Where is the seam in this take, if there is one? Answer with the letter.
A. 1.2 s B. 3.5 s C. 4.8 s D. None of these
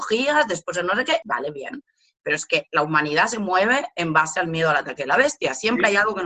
A